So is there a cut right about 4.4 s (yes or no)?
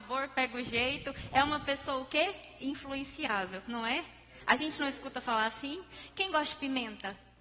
no